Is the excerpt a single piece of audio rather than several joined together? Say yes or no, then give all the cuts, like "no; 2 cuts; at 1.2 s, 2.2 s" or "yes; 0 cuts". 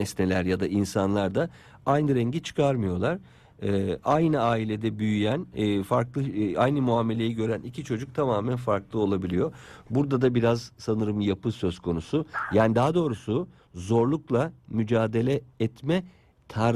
yes; 0 cuts